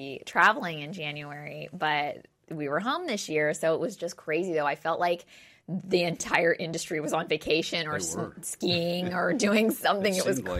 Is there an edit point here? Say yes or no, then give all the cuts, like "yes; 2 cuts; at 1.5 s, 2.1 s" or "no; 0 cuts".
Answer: no; 0 cuts